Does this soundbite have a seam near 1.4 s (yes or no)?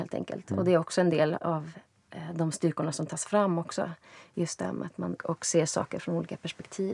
yes